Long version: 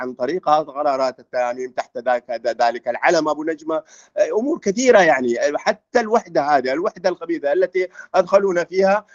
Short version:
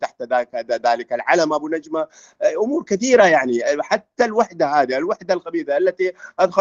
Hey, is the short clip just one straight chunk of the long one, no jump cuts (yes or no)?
yes